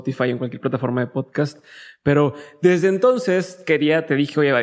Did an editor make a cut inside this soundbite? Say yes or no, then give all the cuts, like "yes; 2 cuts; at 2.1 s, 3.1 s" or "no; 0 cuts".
no; 0 cuts